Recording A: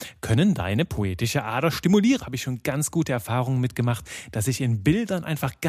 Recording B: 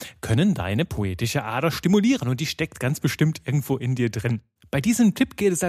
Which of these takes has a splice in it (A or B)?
A